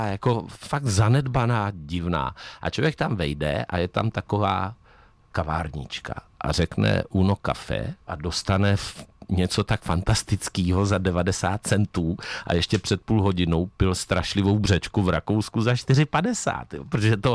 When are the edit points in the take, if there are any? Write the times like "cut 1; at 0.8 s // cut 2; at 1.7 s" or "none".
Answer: cut 1; at 8.0 s